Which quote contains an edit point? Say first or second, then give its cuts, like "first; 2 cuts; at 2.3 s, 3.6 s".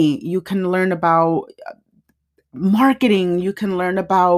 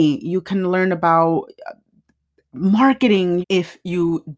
second; 1 cut; at 3.4 s